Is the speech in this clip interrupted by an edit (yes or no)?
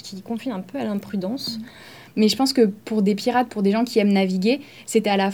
yes